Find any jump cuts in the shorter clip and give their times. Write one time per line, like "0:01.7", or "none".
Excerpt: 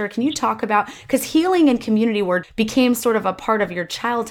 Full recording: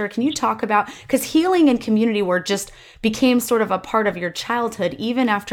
0:02.4

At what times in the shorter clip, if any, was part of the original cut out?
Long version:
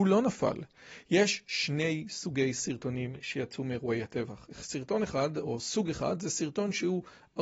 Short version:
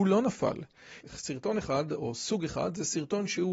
0:01.0

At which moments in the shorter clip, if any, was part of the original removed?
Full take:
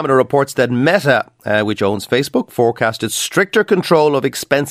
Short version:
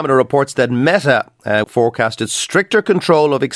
0:01.6

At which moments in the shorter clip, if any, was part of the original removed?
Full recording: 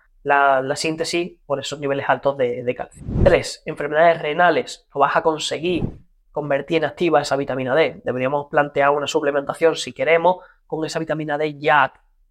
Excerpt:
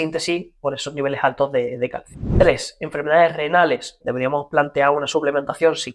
0:04.0

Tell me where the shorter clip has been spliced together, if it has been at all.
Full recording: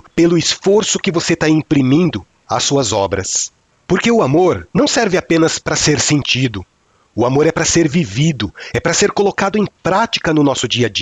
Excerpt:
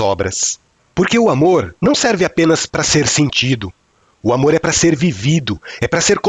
none

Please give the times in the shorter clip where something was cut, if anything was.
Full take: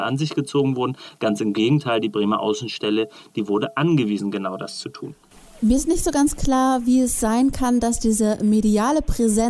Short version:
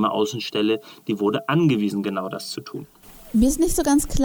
none

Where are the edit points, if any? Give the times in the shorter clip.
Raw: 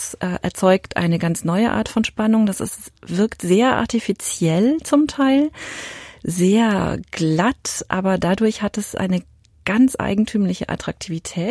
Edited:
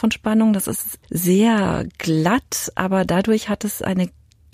0:01.0

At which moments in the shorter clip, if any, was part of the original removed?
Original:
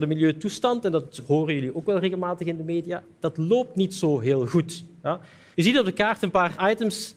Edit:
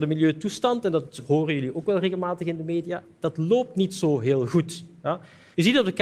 none

